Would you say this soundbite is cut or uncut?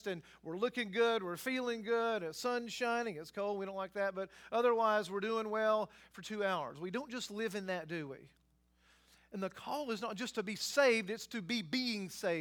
uncut